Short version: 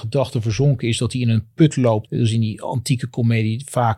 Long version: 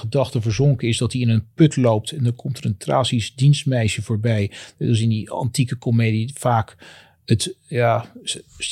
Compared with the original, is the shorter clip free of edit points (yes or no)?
no